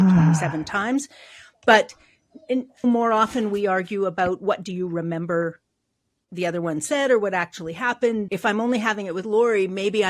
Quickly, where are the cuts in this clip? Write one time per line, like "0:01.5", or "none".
0:02.8
0:08.3